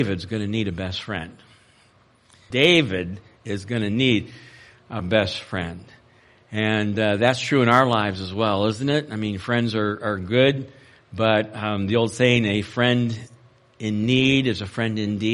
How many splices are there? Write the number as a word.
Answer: one